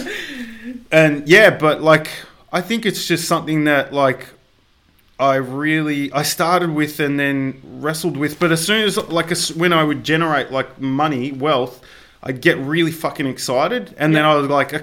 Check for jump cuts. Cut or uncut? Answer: uncut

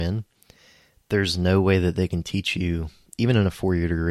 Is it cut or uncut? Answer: uncut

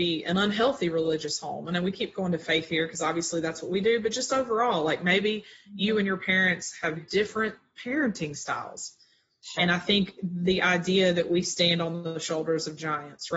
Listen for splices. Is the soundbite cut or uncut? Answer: cut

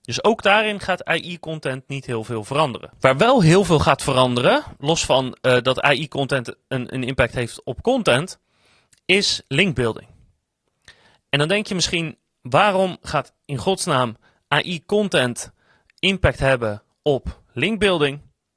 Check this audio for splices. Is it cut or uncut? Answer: uncut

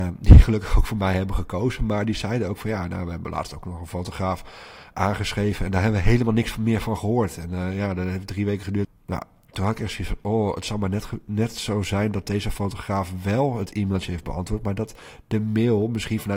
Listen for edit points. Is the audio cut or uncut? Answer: cut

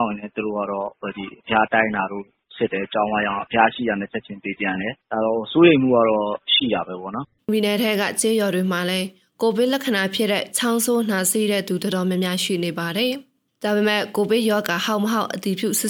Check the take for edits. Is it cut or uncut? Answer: cut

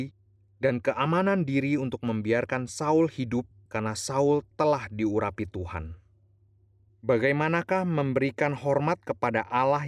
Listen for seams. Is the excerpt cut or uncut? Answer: cut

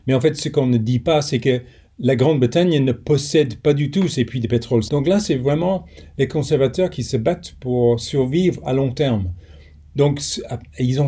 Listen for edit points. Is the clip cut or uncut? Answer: cut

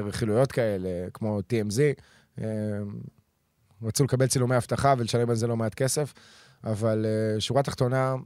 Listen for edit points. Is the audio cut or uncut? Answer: uncut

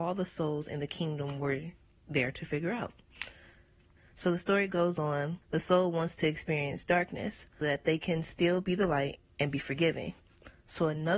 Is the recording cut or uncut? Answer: cut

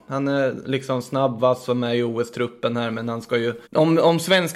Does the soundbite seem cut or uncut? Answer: cut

